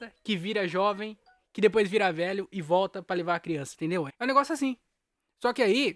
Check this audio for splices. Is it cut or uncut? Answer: cut